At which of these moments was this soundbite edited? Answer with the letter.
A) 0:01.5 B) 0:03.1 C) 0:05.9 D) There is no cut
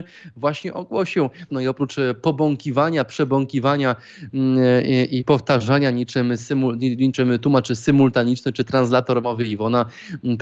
A